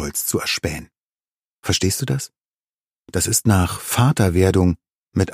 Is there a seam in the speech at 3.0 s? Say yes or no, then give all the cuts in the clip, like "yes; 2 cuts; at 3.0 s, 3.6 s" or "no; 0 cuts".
no; 1 cut; at 1.4 s